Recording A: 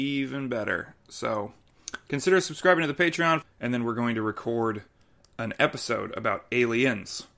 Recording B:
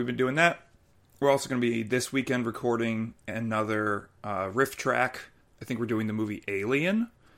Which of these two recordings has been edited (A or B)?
A